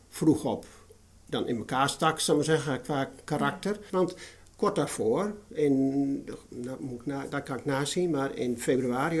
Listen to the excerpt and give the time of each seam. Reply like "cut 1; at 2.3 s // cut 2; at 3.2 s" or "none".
cut 1; at 3.9 s